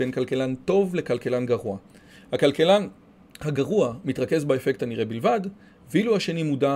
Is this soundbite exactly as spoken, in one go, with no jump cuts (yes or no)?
yes